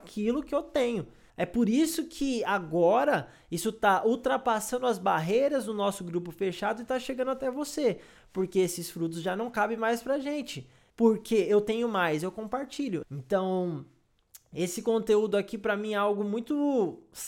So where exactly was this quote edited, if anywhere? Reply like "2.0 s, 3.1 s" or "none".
1.3 s, 10.9 s, 13.0 s